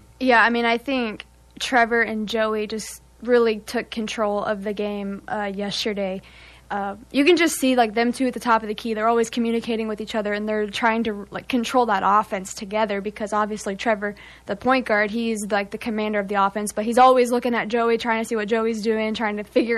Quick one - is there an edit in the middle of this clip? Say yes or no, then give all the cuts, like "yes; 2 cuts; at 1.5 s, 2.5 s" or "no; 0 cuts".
no; 0 cuts